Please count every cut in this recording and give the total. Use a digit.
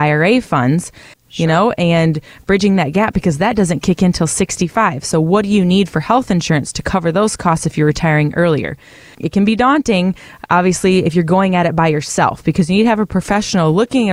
1